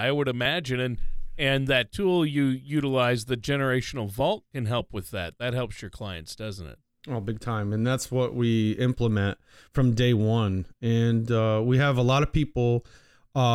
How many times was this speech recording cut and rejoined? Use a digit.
0